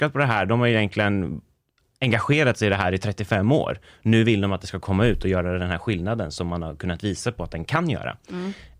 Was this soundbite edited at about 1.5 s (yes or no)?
no